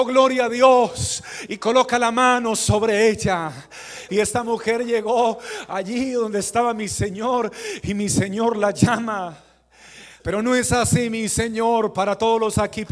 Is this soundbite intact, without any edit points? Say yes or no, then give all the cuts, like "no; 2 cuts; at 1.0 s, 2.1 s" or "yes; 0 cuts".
no; 2 cuts; at 4.1 s, 10.2 s